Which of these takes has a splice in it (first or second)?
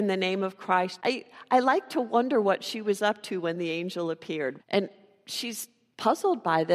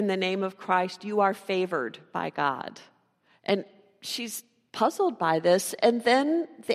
first